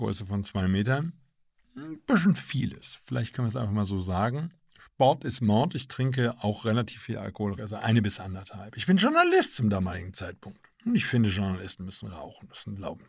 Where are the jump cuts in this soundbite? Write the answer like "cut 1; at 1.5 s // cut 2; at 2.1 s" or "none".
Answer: cut 1; at 7.6 s